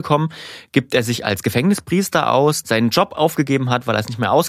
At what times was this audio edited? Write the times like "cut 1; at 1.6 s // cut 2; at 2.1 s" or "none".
cut 1; at 2.6 s